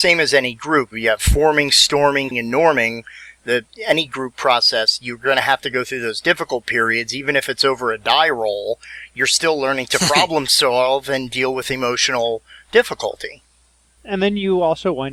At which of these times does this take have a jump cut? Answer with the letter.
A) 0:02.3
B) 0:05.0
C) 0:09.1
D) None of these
A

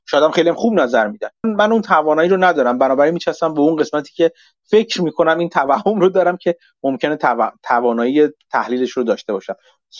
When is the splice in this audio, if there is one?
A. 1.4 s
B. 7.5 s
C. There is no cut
A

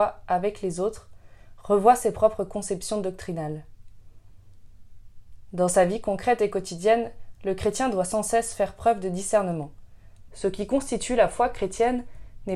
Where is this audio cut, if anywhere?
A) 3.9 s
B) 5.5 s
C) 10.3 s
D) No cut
C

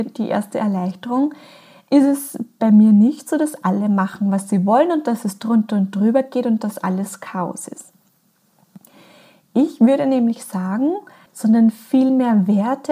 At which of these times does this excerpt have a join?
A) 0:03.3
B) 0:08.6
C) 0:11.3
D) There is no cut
C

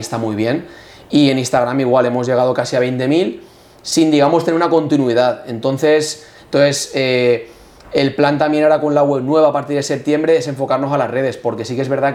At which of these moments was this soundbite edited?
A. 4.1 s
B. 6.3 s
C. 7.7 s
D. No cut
B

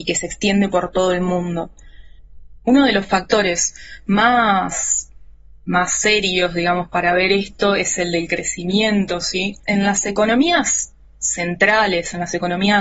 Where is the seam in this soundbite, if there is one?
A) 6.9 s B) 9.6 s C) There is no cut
B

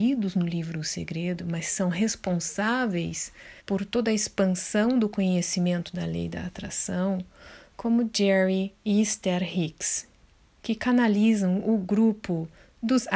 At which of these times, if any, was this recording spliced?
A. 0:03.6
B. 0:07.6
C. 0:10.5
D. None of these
A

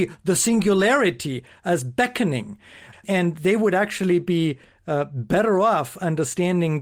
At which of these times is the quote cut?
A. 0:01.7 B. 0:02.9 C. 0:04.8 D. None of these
B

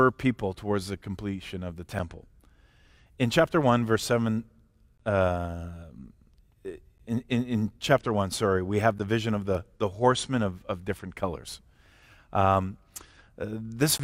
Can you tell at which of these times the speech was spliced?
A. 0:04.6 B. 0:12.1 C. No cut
C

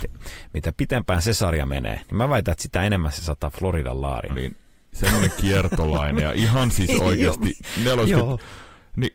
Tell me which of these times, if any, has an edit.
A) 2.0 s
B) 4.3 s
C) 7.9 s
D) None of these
B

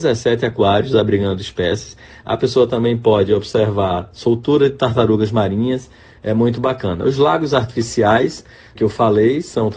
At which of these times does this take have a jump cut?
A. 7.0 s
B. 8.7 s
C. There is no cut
B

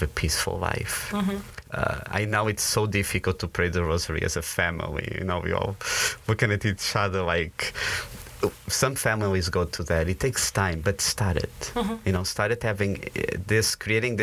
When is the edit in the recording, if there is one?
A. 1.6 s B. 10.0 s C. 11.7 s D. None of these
A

